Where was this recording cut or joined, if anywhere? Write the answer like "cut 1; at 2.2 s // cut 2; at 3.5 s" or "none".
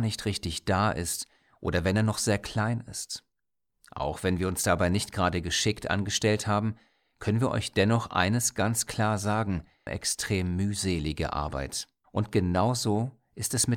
cut 1; at 3.7 s // cut 2; at 9.9 s // cut 3; at 12.0 s